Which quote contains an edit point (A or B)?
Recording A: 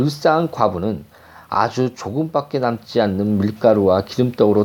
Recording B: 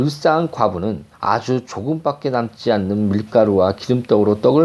B